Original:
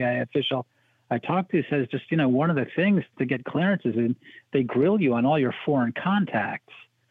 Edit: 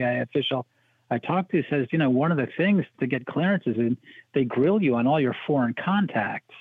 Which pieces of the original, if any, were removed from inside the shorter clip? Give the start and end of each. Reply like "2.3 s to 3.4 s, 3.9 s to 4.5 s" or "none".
1.9 s to 2.1 s